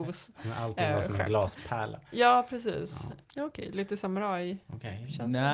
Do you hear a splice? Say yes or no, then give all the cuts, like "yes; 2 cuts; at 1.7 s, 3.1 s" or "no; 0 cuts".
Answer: yes; 1 cut; at 3.2 s